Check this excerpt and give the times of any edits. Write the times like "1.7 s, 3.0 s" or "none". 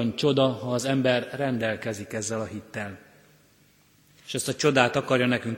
4.1 s